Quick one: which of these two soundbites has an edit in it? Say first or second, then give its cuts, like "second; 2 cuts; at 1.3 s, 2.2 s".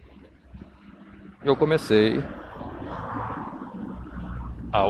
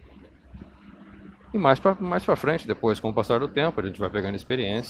first; 1 cut; at 1.4 s